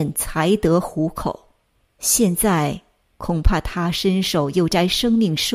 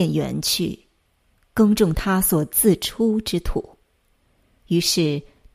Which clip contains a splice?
first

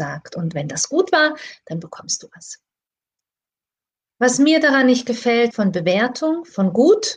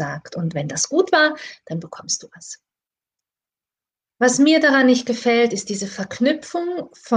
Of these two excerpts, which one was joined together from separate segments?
first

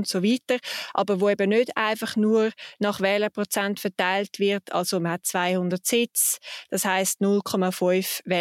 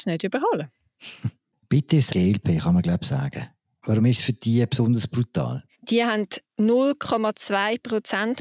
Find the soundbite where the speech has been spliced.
second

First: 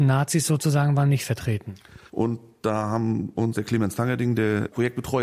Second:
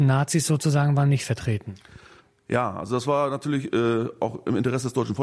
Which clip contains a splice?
first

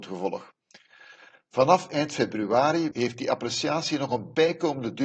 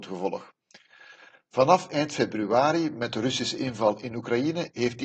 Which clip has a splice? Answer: first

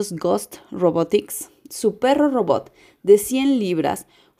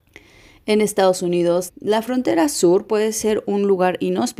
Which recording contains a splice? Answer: second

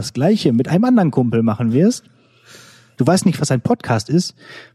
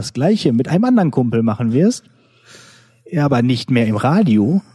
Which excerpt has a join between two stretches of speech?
first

